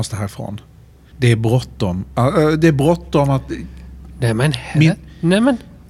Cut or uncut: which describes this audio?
cut